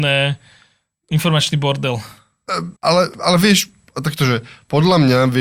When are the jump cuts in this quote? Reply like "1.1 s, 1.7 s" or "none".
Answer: 2.8 s